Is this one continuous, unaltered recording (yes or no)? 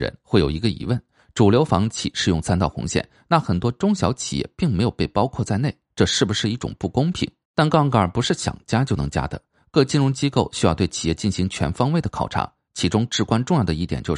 no